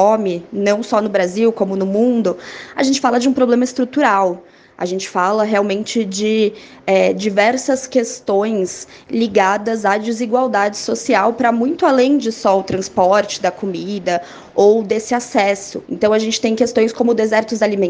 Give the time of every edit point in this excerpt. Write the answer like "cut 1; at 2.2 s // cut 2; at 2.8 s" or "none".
cut 1; at 15.8 s